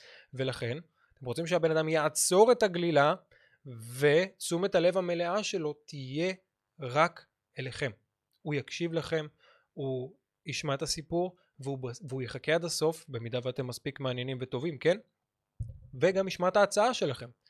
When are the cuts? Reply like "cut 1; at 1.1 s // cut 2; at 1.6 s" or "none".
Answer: none